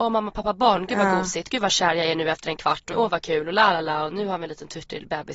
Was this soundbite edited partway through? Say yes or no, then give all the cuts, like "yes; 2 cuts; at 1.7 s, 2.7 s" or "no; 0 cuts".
yes; 1 cut; at 2.9 s